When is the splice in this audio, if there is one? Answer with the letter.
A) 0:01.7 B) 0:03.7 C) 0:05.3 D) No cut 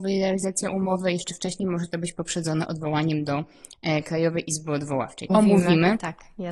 C